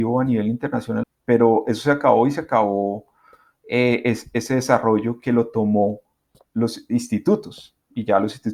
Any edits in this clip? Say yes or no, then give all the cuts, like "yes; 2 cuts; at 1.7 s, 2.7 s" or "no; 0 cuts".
yes; 1 cut; at 1.0 s